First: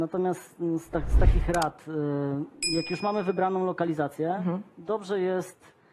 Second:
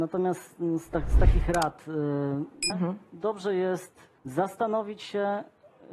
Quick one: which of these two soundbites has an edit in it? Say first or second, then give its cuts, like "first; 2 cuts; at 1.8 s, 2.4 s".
second; 2 cuts; at 2.7 s, 4.2 s